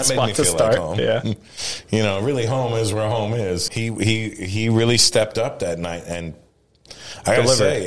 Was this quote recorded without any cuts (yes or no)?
no